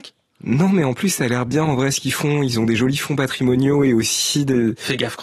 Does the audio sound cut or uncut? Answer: uncut